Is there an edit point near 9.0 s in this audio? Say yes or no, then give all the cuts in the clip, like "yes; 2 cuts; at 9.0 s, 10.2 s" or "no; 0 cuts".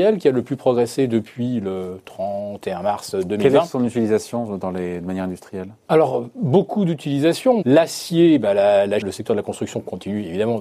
yes; 2 cuts; at 7.6 s, 9.0 s